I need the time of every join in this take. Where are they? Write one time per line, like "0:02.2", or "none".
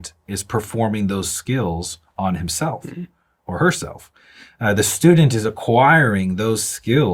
none